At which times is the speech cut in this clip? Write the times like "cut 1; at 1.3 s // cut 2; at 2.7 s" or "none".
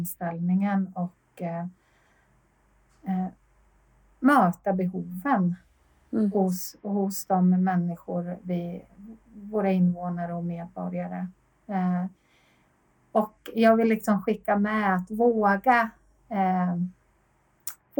none